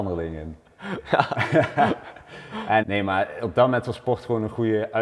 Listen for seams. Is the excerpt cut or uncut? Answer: cut